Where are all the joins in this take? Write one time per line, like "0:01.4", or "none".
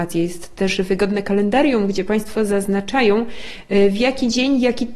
none